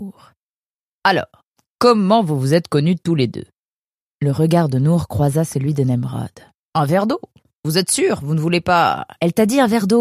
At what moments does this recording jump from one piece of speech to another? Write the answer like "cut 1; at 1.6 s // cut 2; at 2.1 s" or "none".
cut 1; at 6.7 s